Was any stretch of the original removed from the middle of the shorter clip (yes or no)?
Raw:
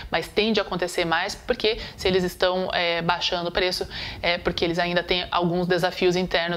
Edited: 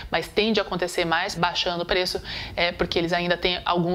yes